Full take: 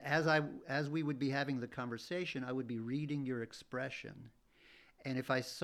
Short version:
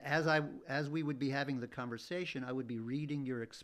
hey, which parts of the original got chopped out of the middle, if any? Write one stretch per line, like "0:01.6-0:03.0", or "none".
none